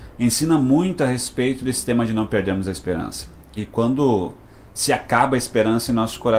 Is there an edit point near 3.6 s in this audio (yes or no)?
yes